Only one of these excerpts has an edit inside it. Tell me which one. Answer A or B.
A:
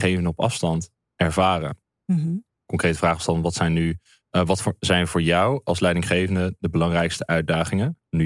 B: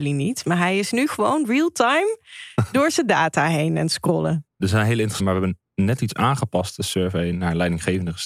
B